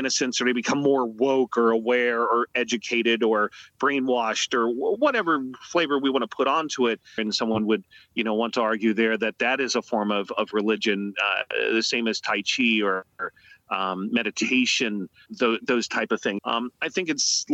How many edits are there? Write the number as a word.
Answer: three